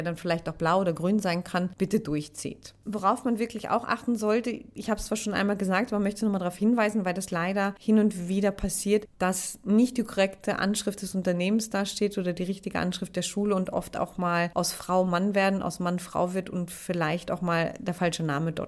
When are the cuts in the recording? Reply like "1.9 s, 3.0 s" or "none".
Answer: none